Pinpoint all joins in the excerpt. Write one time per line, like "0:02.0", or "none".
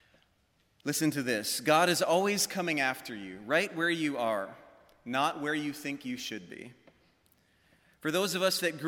none